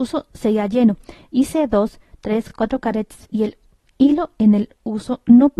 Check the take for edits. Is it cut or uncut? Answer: uncut